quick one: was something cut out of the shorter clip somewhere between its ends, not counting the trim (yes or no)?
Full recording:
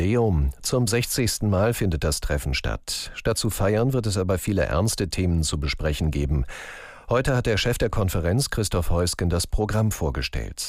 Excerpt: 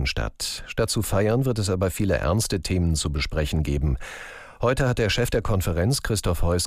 no